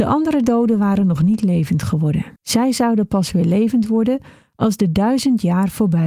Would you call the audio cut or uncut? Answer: cut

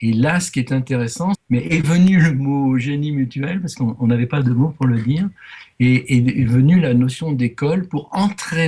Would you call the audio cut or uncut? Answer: cut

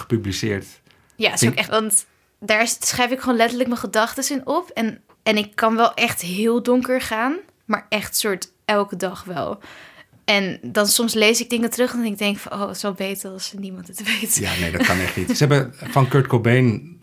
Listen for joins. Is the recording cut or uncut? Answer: cut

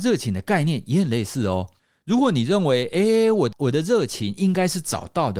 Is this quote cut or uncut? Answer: uncut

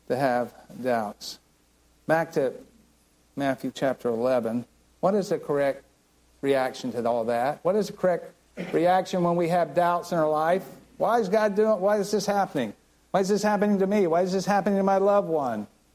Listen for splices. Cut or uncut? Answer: uncut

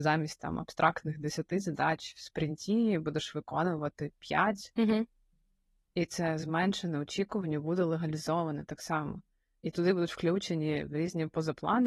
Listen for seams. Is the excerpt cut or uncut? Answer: uncut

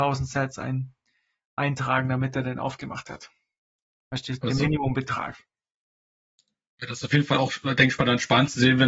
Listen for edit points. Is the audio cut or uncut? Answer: uncut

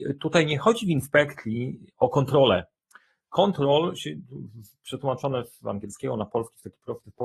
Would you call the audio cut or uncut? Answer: uncut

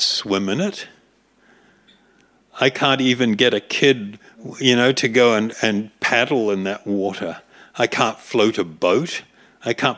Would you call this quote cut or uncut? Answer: uncut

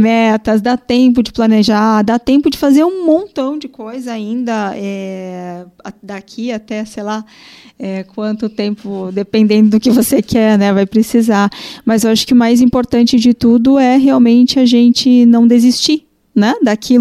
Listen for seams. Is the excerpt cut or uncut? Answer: uncut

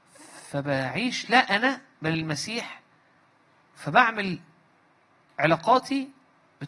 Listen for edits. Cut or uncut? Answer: uncut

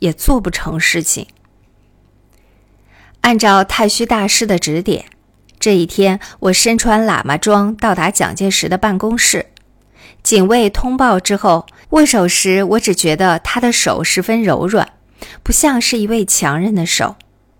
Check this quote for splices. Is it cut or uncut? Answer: cut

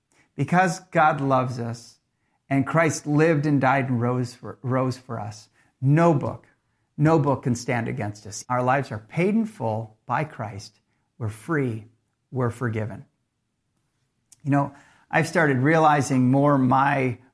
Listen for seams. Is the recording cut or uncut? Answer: cut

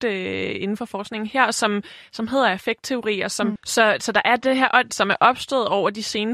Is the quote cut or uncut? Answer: cut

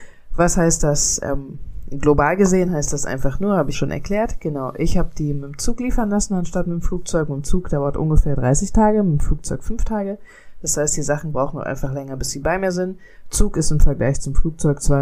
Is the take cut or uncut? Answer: cut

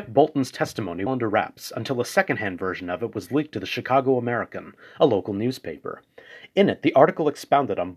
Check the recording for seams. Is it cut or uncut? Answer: cut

